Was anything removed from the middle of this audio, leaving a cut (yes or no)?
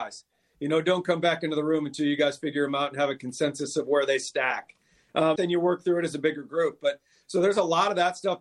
yes